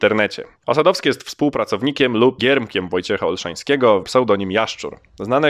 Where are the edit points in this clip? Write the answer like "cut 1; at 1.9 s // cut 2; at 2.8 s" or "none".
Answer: cut 1; at 2.4 s // cut 2; at 4.0 s

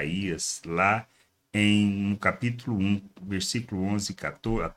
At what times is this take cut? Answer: none

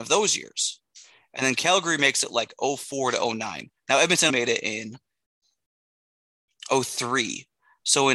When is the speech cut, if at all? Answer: cut 1; at 4.3 s

